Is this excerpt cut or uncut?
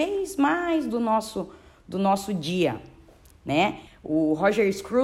cut